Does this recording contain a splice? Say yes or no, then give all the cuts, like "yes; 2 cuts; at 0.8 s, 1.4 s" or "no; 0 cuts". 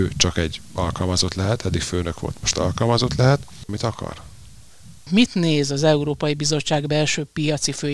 yes; 2 cuts; at 3.7 s, 5.1 s